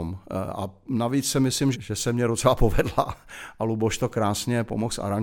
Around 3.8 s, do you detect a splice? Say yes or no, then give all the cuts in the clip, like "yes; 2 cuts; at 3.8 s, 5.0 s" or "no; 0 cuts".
no; 1 cut; at 1.7 s